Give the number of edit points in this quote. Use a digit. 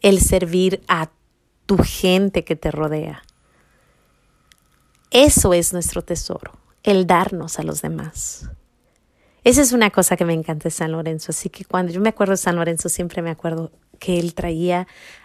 0